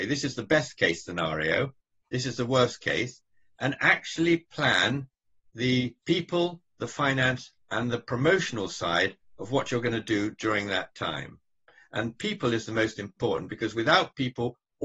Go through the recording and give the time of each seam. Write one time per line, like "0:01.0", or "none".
0:06.0